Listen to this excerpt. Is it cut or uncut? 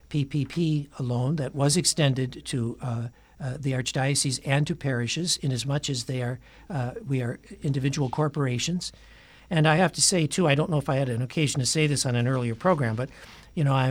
uncut